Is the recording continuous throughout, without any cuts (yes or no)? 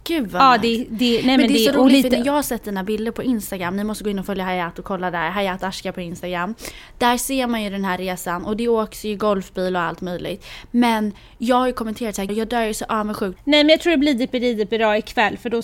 no